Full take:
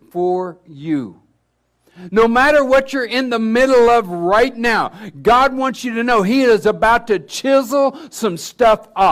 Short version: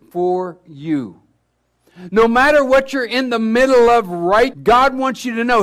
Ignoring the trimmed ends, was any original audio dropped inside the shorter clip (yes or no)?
yes